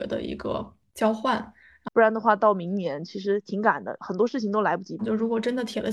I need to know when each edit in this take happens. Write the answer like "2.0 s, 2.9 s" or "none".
1.9 s, 5.0 s